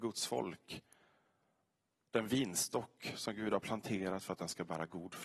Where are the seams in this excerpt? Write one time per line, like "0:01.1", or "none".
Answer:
none

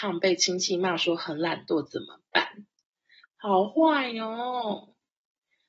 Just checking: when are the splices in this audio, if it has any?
0:03.2

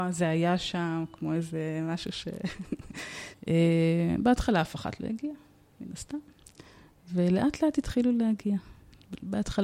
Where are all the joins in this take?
0:03.3

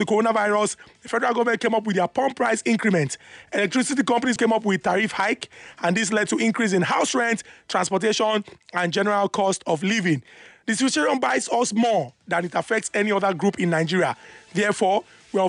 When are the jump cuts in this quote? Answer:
0:04.4

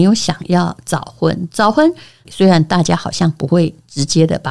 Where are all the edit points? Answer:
0:02.3

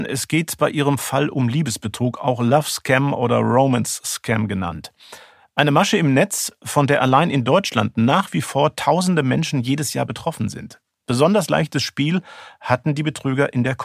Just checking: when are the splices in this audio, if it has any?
none

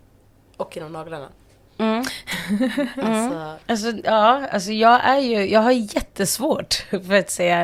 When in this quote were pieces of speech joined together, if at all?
0:03.6

